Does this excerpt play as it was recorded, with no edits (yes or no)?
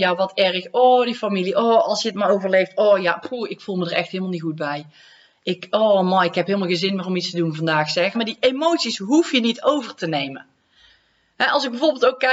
no